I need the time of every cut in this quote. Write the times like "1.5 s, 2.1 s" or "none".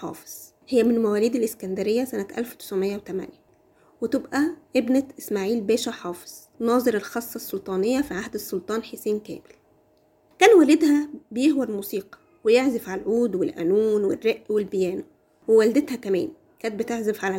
6.5 s